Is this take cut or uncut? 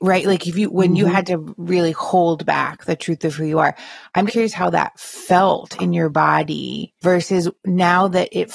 cut